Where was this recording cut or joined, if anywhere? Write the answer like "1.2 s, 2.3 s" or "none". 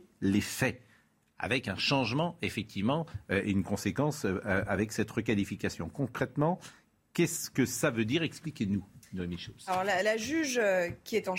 none